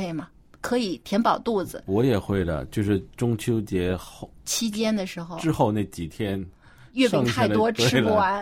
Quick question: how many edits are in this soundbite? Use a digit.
0